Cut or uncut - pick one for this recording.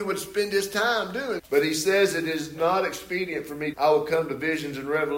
cut